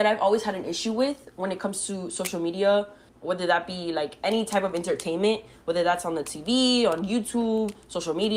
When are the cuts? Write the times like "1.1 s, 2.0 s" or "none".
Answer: 3.1 s